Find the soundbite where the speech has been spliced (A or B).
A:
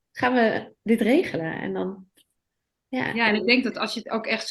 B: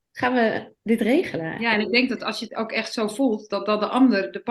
B